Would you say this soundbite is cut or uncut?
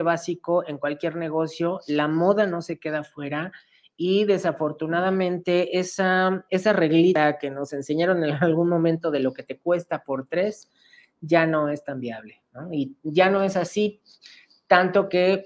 uncut